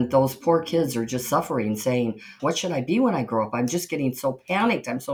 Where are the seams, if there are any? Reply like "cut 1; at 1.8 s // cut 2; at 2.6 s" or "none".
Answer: cut 1; at 2.4 s